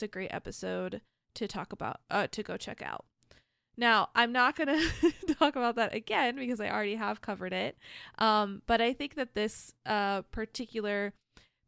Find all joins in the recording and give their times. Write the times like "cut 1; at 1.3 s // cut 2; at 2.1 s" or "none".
none